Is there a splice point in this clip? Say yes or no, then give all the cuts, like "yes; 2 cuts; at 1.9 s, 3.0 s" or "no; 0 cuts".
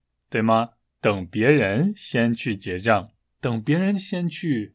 yes; 1 cut; at 0.9 s